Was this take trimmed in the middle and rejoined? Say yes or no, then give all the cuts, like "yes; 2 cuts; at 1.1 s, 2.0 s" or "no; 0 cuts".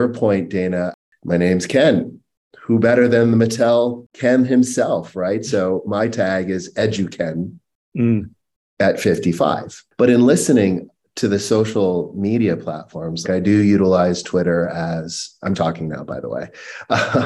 yes; 3 cuts; at 9.9 s, 13.2 s, 15.5 s